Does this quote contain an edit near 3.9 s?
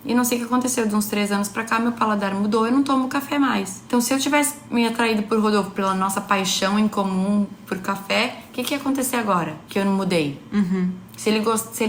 no; 0 cuts

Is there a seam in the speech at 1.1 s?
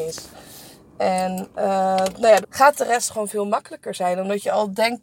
no; 1 cut; at 2.4 s

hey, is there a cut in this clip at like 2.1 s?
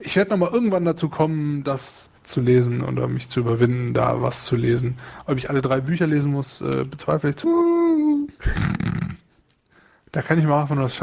yes; 2 cuts; at 2.1 s, 7.4 s

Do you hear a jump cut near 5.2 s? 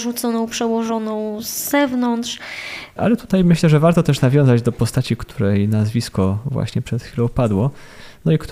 no; 1 cut; at 3.0 s

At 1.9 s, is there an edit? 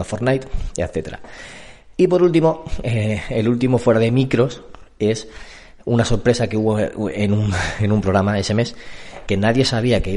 yes; 2 cuts; at 1.9 s, 9.3 s

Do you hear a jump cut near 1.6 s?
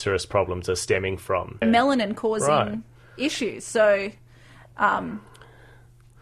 yes; 1 cut; at 1.6 s

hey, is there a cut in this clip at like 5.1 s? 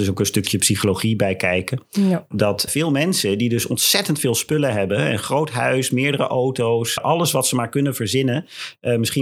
no; 2 cuts; at 2.7 s, 7.0 s

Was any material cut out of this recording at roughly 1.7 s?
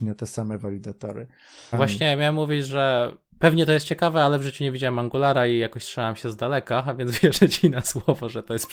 yes; 1 cut; at 1.7 s

